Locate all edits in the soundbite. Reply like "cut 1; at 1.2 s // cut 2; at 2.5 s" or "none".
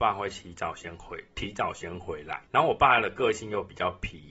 none